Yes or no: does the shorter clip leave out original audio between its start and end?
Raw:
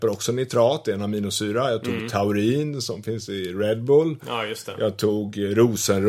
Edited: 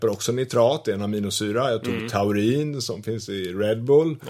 no